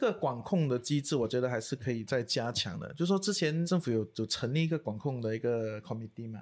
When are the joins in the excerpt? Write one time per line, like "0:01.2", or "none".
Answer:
0:02.1